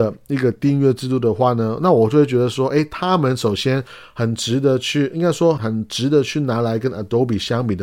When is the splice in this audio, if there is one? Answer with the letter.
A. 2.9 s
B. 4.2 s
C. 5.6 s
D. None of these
C